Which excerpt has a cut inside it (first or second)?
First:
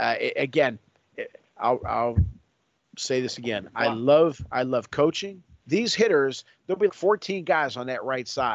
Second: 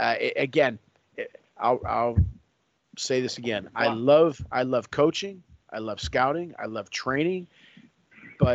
first